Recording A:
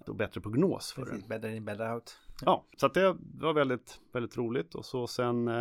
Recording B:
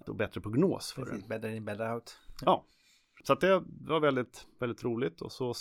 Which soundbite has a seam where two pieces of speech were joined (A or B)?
A